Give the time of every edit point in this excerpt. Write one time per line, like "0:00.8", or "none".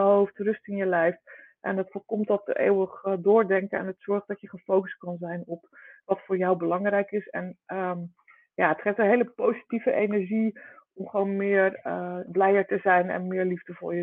0:12.3